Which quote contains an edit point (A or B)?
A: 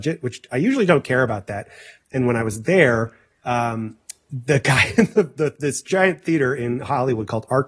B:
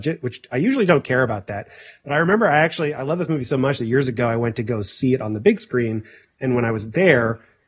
A